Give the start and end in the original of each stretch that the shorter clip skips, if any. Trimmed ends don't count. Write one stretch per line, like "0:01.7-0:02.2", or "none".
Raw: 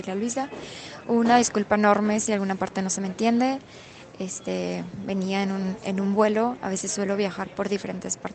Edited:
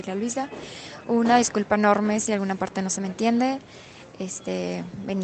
none